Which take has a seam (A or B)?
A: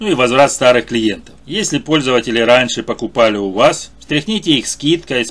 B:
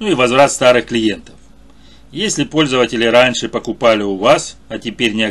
A